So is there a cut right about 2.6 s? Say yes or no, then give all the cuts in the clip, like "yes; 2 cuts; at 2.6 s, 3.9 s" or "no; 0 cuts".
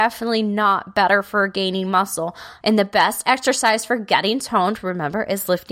yes; 1 cut; at 2.6 s